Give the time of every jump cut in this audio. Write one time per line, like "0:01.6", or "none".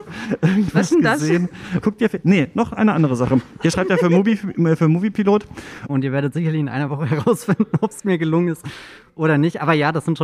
0:01.8
0:05.9

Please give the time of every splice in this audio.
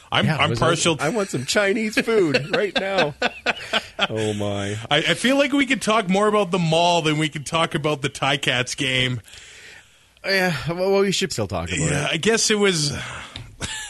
0:01.0
0:11.3

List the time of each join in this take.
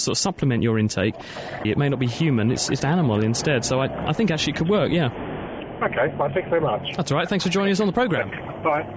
0:01.6
0:02.8

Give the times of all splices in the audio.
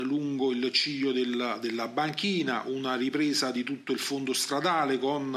none

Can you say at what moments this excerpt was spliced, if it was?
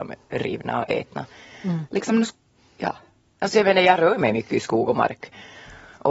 0:01.9

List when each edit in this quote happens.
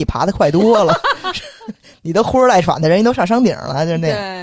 none

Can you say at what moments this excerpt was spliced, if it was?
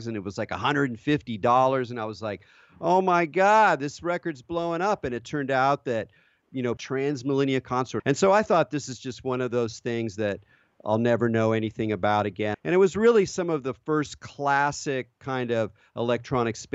0:06.8
0:08.0
0:12.5

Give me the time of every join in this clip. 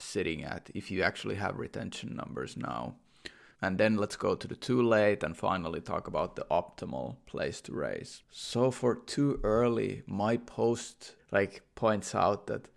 0:03.5
0:11.2

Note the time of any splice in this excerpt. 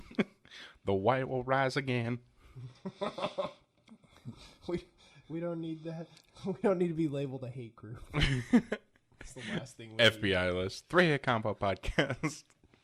none

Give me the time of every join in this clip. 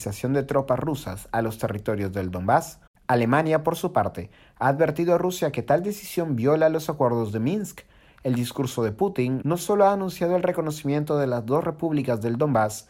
0:09.4

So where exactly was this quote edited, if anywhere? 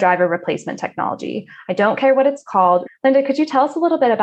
0:02.9

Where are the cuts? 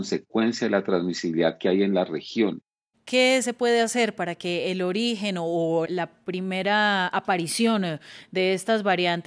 0:02.9
0:05.8

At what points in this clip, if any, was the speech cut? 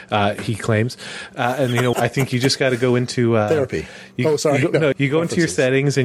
0:01.9
0:04.9

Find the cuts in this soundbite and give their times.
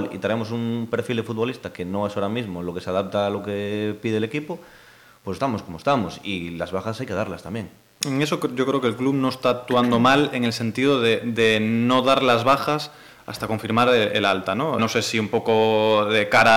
0:08.0
0:14.8

